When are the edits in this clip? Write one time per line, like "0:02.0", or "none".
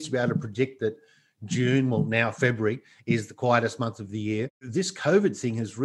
none